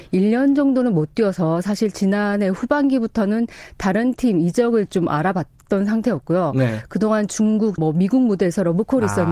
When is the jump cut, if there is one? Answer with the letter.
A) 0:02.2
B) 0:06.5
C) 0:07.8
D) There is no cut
C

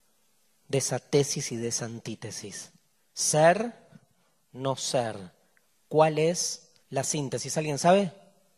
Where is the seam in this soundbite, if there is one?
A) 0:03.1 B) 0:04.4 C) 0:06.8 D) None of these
C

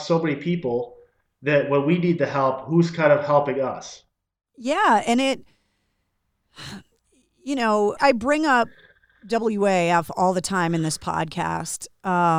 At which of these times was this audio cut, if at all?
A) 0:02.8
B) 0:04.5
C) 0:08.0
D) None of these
C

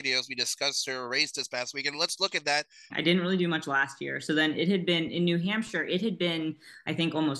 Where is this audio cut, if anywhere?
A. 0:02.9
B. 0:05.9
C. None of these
A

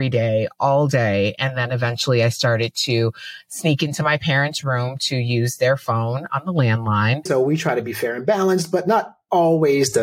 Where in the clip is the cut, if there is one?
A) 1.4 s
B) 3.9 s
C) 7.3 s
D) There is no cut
C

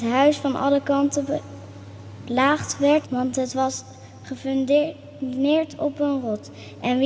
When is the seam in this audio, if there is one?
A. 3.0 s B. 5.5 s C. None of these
A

